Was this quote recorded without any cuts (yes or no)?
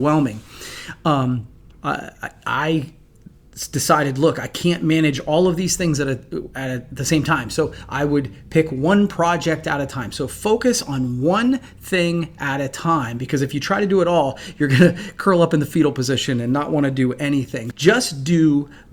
no